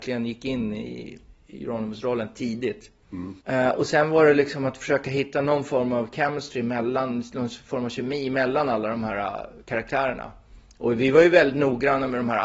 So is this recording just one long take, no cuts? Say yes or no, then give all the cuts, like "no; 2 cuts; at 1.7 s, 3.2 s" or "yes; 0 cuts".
no; 1 cut; at 3.4 s